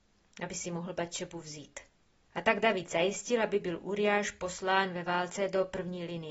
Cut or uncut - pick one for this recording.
uncut